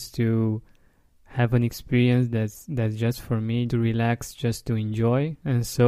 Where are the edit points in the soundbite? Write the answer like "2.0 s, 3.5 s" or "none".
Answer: 3.7 s